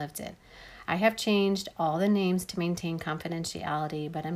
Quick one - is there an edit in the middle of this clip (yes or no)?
no